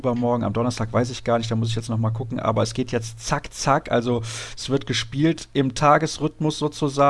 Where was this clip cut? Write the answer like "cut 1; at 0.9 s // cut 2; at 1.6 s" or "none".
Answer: none